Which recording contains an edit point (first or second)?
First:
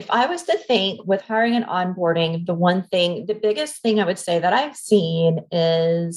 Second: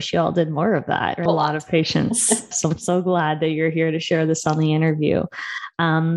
second